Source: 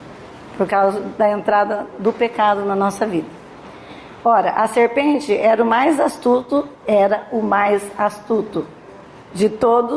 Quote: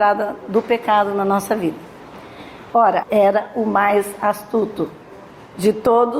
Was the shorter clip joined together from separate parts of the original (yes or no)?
yes